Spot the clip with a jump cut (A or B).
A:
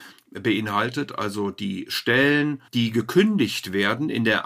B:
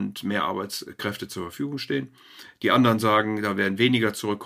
A